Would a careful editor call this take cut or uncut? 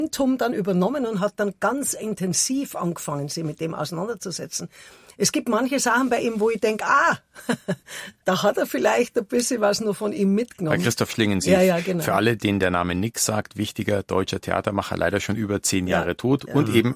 uncut